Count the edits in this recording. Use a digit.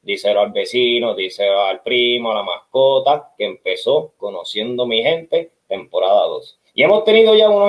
1